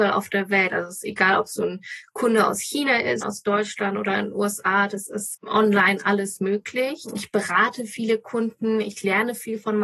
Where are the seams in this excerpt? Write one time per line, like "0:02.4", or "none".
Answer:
0:03.2